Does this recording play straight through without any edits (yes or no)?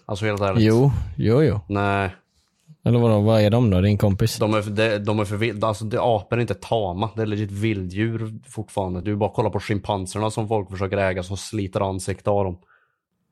yes